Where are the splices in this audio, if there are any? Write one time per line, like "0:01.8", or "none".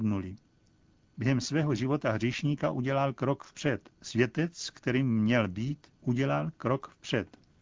0:03.9
0:05.9